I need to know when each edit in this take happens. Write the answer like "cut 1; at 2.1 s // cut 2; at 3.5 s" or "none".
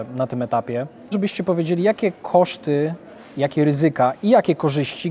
cut 1; at 1.1 s